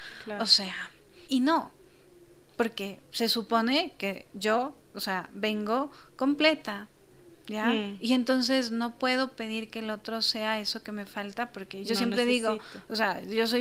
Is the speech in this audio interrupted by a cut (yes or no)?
yes